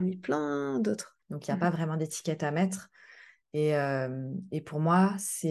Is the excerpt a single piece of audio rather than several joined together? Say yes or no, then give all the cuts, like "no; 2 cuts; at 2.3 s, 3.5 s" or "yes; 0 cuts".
no; 1 cut; at 1.2 s